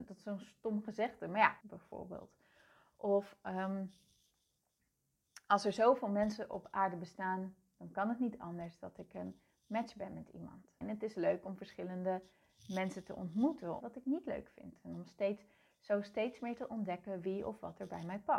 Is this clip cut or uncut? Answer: cut